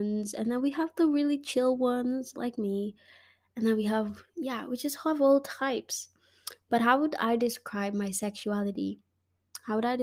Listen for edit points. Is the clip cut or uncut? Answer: uncut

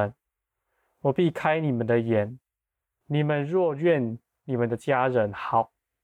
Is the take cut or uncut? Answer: cut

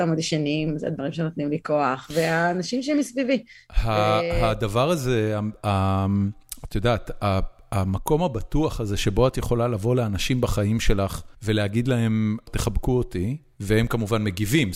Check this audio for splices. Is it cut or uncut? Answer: cut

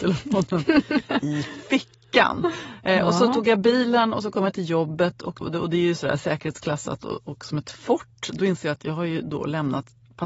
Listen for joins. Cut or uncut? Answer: cut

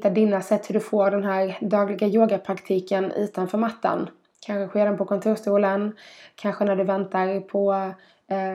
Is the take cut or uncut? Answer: uncut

